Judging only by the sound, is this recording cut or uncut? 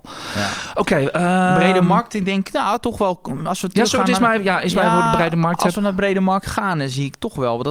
uncut